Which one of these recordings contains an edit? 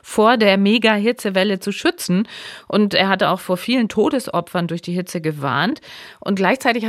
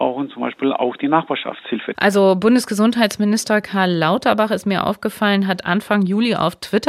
second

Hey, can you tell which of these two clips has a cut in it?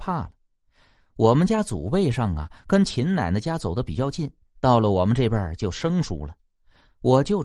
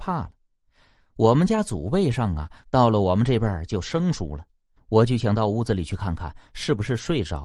second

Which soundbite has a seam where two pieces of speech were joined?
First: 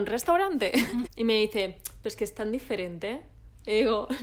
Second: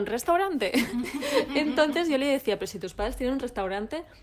first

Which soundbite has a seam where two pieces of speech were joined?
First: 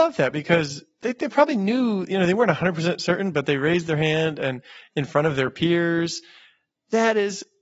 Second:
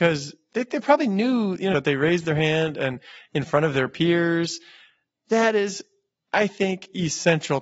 second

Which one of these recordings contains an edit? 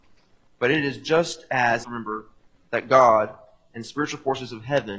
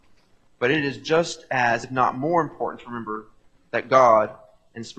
first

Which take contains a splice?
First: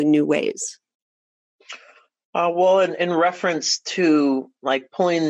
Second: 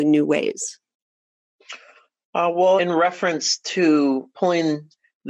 second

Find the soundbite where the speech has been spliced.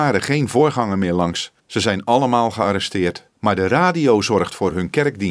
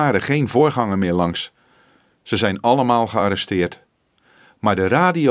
first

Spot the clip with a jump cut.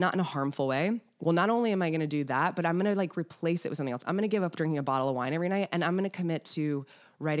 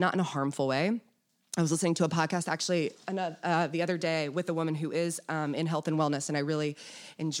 first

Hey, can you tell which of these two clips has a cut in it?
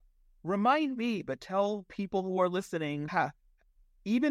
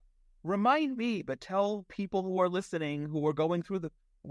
first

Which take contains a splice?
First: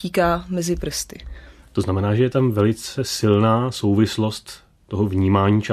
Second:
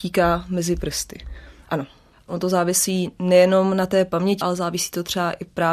second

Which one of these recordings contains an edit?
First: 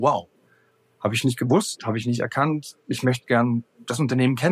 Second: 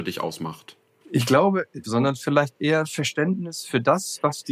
second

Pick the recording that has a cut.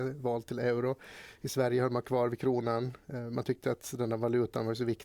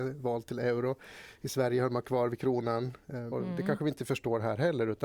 second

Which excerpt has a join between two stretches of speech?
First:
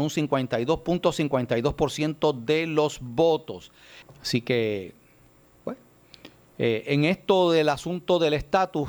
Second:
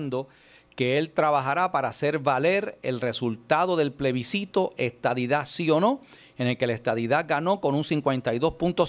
first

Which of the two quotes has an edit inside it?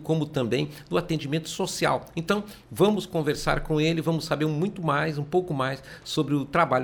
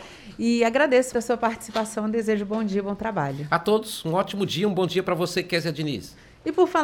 second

